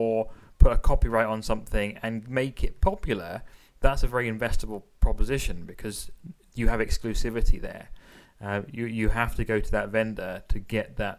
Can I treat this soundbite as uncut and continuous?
yes; 0 cuts

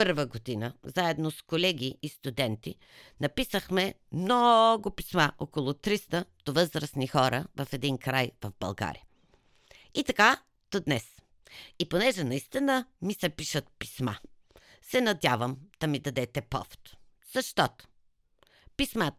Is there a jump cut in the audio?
no; 0 cuts

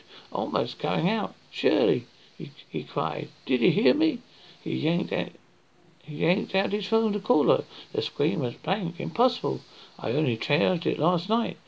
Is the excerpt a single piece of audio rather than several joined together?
yes; 0 cuts

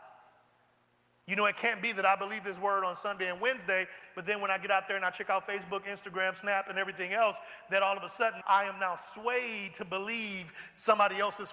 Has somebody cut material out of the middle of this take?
yes; 1 cut; at 8.4 s

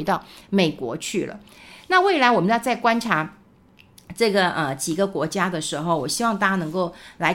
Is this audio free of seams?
yes; 0 cuts

